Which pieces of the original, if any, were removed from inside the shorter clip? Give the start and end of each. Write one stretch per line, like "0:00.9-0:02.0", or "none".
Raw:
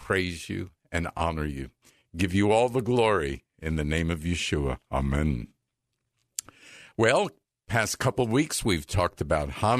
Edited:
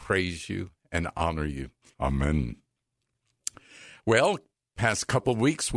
0:01.9-0:04.8

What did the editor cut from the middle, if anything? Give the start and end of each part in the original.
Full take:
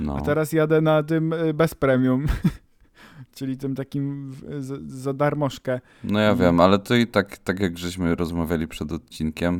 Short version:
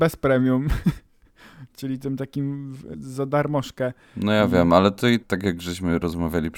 0:04.5-0:04.8
0:07.1-0:07.4

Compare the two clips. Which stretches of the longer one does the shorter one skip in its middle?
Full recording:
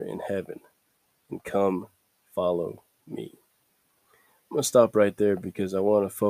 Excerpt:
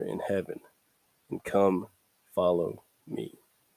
none

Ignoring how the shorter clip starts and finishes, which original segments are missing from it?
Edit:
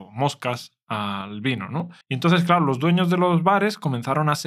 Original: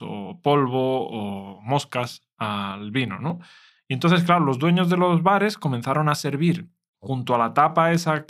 0:03.5-0:03.8

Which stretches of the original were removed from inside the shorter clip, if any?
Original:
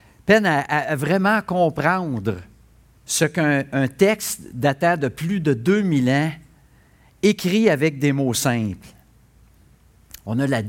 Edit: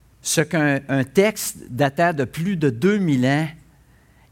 none

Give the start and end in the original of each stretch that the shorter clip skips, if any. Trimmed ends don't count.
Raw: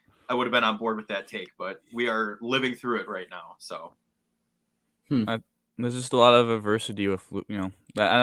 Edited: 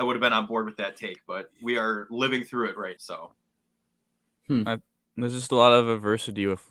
0:03.3-0:03.6

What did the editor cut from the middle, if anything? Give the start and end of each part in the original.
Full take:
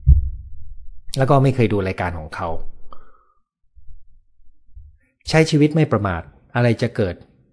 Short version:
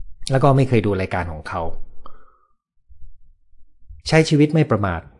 0:04.9-0:05.2

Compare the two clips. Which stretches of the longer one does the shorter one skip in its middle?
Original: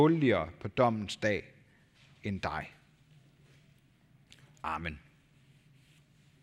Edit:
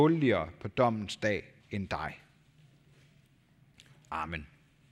0:01.6-0:02.1

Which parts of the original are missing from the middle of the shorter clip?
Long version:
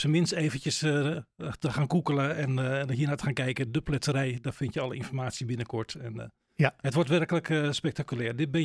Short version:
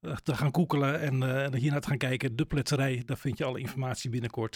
none

